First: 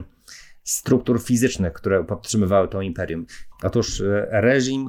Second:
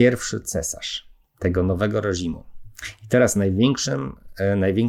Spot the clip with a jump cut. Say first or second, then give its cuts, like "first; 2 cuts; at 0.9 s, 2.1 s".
first; 1 cut; at 3.5 s